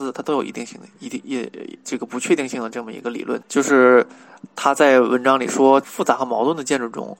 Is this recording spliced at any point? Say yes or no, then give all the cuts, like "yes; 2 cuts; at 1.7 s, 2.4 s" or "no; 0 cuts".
yes; 2 cuts; at 3.4 s, 5.8 s